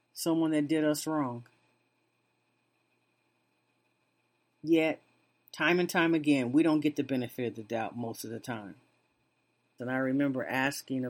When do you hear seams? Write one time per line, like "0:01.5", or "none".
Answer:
0:09.8